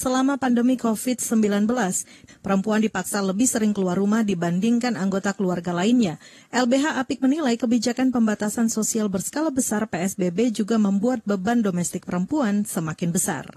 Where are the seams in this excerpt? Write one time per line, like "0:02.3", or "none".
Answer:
0:02.3